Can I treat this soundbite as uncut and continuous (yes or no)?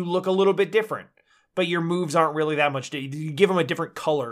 yes